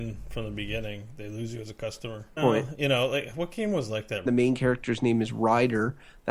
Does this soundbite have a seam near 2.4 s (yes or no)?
yes